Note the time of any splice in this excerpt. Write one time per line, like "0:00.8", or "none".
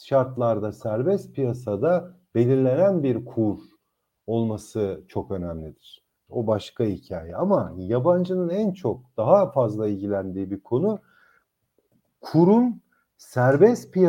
0:06.3